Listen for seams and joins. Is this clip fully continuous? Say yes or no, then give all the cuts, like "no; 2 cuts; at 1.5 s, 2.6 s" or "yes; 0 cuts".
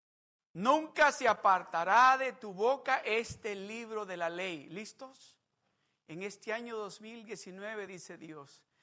yes; 0 cuts